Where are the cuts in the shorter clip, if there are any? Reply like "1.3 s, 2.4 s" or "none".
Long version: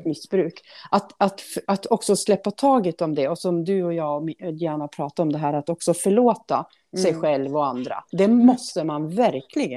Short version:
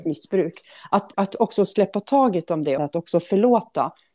1.1 s, 2.8 s